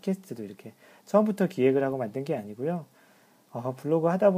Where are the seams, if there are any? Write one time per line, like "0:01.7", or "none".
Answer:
none

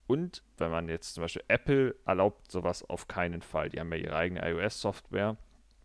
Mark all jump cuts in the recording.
none

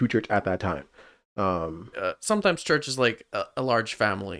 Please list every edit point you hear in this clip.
0:01.9

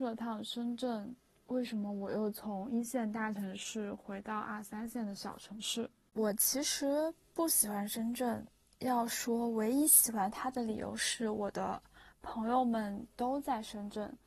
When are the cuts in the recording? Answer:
none

